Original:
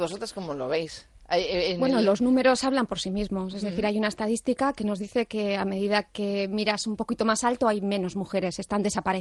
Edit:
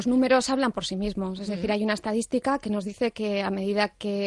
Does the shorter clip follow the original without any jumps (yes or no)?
yes